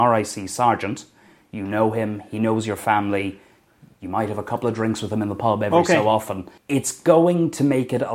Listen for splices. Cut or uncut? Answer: cut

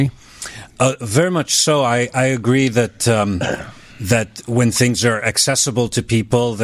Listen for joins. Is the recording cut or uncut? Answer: uncut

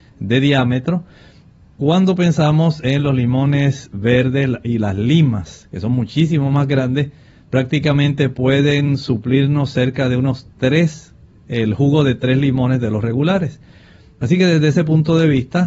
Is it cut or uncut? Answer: uncut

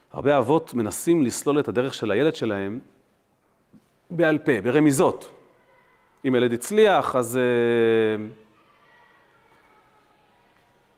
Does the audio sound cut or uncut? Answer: uncut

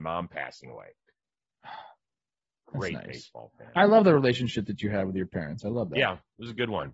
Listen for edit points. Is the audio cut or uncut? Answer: cut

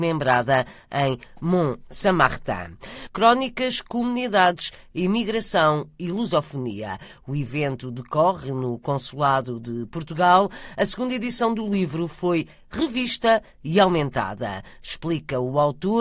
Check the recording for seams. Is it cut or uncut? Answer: cut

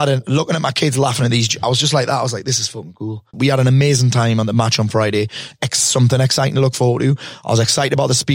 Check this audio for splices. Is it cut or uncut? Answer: cut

